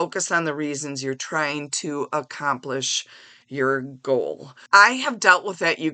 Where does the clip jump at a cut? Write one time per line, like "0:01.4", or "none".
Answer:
0:04.7